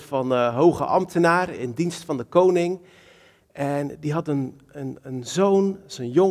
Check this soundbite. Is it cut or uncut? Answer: uncut